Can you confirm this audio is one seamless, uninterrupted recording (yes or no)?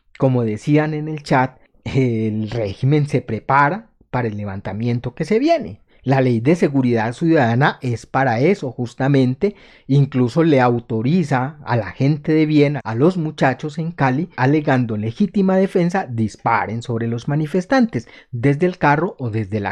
no